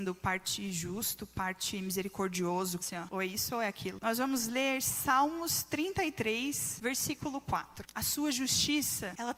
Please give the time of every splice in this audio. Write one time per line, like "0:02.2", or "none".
0:02.8
0:04.0
0:07.9